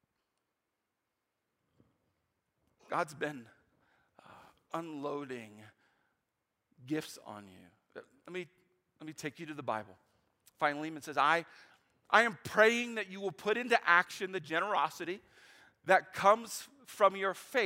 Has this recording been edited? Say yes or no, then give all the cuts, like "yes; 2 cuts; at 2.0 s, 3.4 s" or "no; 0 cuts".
no; 0 cuts